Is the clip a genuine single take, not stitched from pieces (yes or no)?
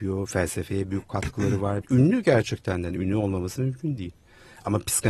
no